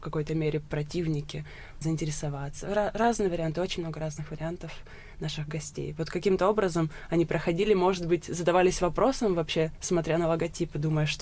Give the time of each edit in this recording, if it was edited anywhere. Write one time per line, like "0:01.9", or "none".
0:01.8